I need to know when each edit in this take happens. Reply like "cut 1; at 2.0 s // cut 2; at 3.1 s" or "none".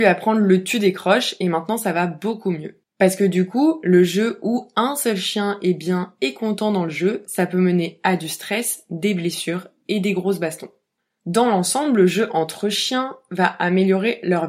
none